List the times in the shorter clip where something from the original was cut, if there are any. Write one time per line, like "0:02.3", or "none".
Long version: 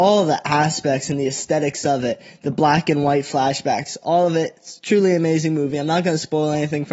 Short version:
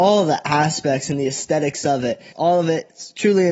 0:02.3